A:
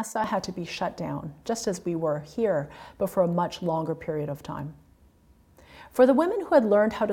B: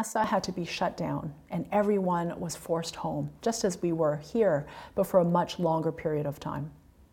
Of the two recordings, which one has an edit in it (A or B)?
A